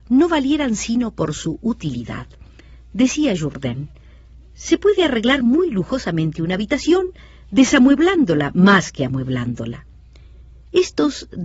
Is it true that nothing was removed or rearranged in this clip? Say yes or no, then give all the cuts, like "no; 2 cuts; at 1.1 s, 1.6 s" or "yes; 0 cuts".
yes; 0 cuts